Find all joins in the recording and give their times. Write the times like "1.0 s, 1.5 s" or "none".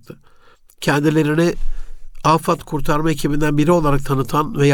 none